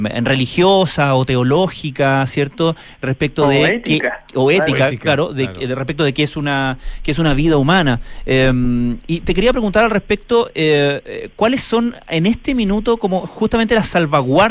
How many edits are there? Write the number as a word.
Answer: zero